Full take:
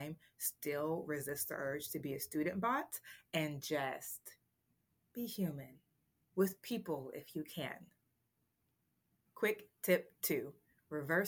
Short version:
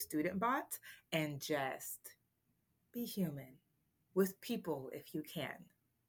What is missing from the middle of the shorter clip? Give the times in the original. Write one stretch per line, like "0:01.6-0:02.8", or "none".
none